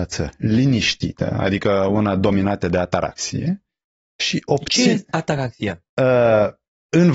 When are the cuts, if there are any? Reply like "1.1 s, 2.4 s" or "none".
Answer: none

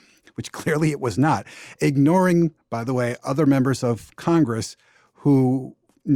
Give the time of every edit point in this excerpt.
none

